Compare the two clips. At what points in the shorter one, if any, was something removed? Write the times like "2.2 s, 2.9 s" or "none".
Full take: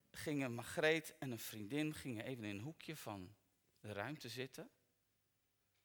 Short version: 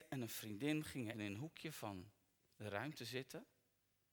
1.1 s